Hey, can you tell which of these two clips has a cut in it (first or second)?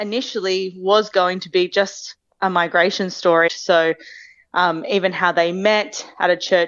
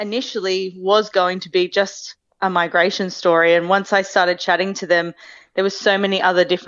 first